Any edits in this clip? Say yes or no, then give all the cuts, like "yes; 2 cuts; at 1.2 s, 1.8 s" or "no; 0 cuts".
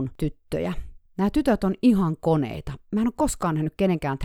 no; 0 cuts